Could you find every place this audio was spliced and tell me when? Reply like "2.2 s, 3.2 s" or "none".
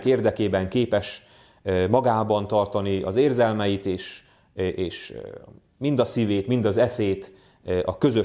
none